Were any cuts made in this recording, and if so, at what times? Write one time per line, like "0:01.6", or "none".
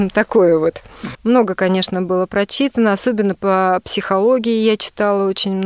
0:01.1